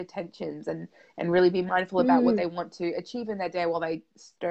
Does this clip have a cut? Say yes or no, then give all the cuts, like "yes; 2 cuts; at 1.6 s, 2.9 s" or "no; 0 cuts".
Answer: no; 0 cuts